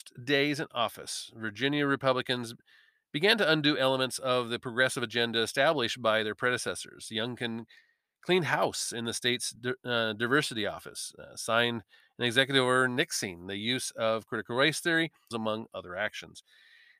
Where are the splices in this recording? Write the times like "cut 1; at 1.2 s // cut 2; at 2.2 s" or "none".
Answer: cut 1; at 15.3 s